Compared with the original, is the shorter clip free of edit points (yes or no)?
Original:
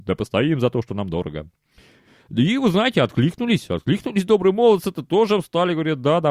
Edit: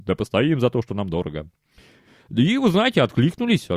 yes